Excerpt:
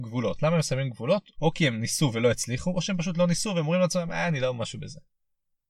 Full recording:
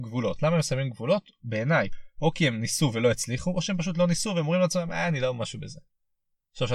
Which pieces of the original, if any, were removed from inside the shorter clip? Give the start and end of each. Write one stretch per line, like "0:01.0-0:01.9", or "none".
0:01.3-0:02.1